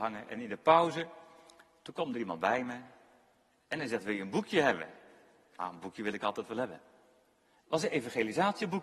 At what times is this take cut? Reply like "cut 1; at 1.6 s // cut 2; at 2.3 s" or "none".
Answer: none